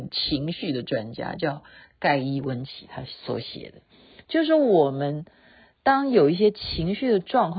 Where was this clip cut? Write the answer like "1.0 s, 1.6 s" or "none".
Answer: none

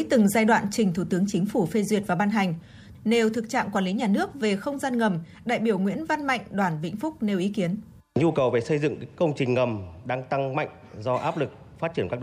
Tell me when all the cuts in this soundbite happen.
2.9 s

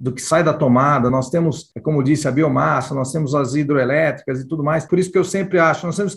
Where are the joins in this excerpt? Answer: none

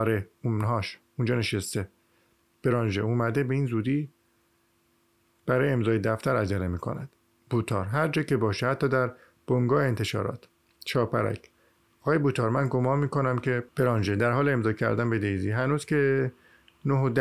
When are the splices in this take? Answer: 13.7 s

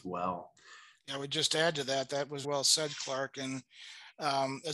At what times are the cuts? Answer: 1.1 s, 2.4 s

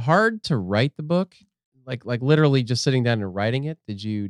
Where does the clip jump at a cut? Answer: none

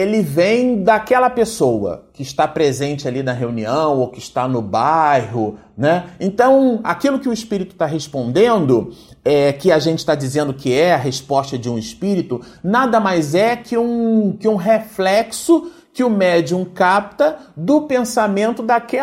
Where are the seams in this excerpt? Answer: none

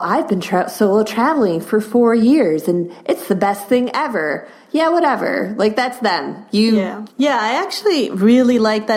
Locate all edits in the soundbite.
7.1 s

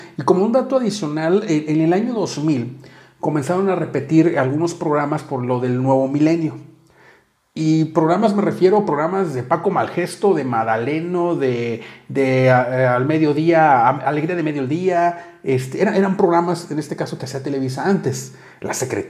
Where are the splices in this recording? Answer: none

